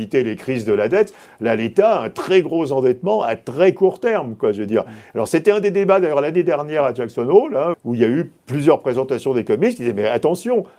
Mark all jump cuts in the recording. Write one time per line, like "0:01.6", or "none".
0:07.7